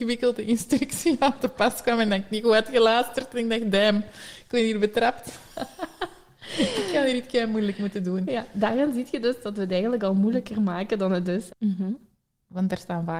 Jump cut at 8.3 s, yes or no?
no